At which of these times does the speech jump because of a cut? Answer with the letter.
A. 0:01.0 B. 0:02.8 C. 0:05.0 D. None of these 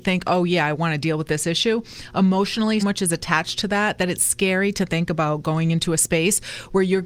B